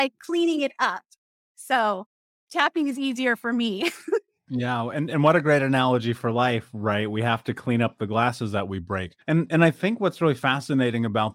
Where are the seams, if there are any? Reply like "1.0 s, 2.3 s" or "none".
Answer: 9.2 s